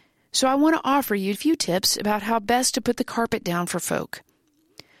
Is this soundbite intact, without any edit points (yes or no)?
no